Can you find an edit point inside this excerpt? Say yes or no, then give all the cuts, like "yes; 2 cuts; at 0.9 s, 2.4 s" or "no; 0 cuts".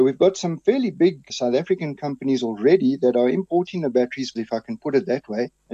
yes; 1 cut; at 4.4 s